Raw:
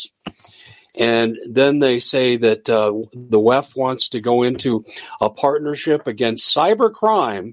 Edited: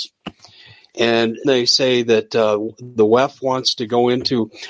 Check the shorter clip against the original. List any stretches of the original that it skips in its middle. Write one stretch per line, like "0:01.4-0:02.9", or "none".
0:01.4-0:01.8